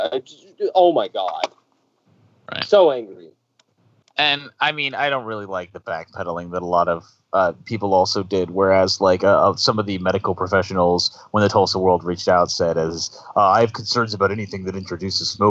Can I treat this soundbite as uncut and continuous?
yes; 0 cuts

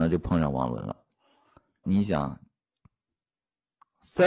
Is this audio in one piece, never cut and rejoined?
no; 1 cut; at 1.8 s

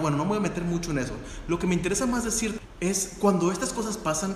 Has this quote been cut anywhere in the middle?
no; 0 cuts

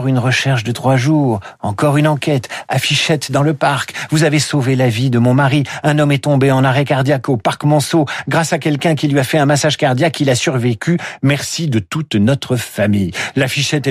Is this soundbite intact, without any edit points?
yes; 0 cuts

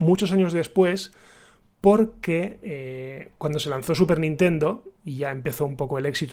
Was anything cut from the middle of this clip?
no; 0 cuts

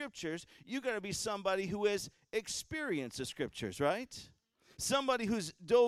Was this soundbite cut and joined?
no; 0 cuts

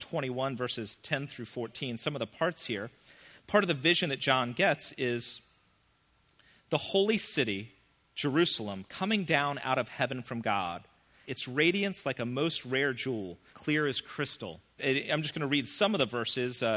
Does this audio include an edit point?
yes; 3 cuts; at 11.2 s, 13.5 s, 14.8 s

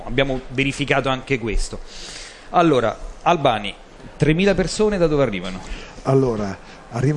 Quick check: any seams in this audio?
no; 0 cuts

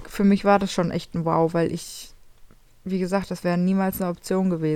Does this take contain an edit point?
no; 0 cuts

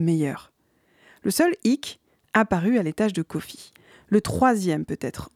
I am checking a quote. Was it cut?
no; 0 cuts

